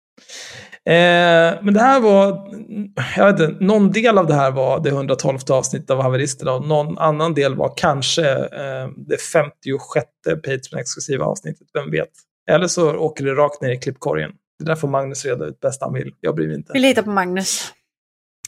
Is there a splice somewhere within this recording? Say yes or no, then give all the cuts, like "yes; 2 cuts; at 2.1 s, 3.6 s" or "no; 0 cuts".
no; 0 cuts